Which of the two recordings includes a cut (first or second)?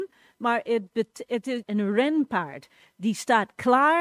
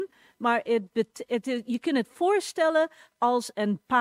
first